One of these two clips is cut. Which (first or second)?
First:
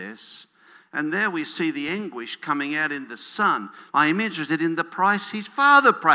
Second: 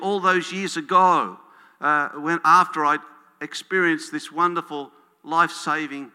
first